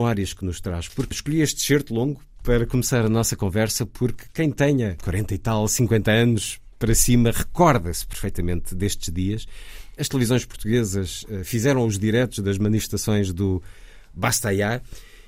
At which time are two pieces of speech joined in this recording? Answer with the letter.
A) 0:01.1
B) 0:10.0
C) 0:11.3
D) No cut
A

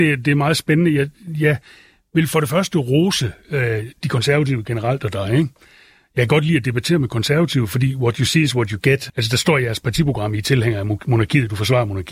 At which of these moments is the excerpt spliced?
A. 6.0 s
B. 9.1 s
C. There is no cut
B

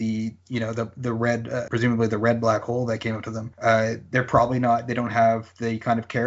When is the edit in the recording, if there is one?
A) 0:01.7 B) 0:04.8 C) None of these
A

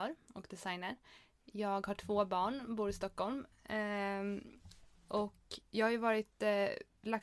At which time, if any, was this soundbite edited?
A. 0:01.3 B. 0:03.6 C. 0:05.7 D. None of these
C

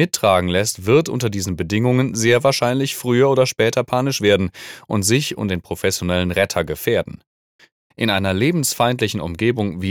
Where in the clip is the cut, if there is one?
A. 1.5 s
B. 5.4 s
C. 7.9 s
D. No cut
C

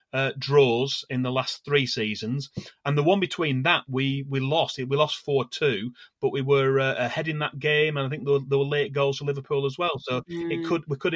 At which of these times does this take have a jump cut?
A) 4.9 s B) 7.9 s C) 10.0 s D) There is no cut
D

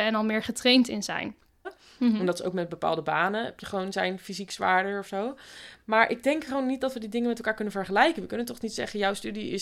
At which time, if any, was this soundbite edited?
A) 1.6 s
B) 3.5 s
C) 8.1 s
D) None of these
A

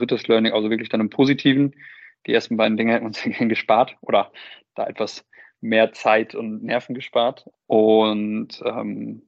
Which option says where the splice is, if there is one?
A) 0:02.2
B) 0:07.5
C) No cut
B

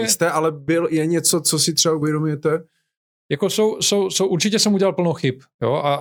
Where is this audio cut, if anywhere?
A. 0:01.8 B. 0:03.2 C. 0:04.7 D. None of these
D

